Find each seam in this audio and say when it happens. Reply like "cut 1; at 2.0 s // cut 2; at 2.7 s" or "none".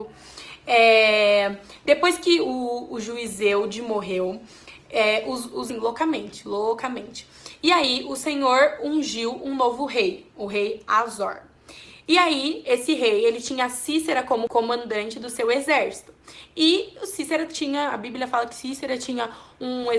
cut 1; at 5.7 s